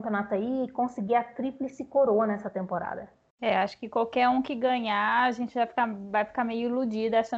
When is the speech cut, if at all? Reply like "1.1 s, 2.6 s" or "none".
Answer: none